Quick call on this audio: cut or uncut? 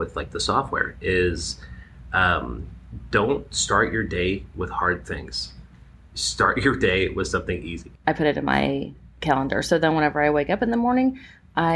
cut